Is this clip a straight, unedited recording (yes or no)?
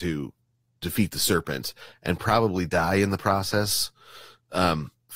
yes